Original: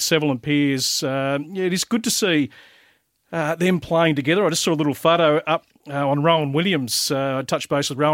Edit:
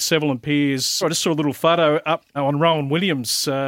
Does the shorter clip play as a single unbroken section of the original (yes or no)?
no